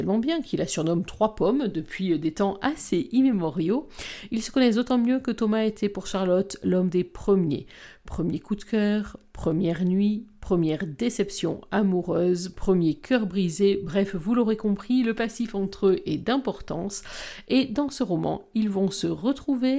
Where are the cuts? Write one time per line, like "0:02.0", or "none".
none